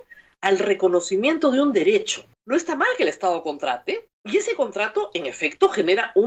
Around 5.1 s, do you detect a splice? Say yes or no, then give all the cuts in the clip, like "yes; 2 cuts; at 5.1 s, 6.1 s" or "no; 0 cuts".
no; 1 cut; at 2.3 s